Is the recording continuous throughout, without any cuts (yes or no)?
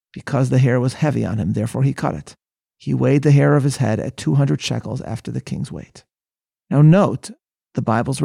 yes